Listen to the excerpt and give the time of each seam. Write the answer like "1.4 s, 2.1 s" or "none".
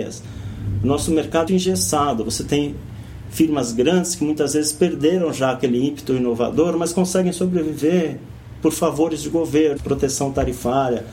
1.5 s, 9.8 s